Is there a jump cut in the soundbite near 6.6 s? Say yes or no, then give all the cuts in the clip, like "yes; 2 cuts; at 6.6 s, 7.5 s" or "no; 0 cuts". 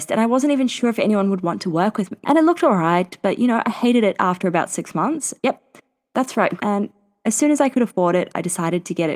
yes; 3 cuts; at 2.2 s, 5.4 s, 6.6 s